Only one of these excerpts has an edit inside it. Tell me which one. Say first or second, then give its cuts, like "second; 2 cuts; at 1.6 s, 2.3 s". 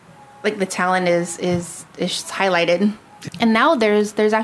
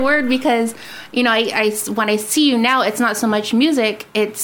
first; 1 cut; at 3.3 s